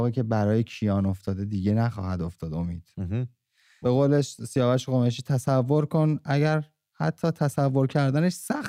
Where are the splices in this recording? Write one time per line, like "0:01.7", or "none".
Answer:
0:03.8